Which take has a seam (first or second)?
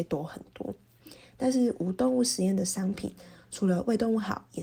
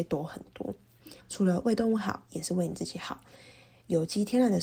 second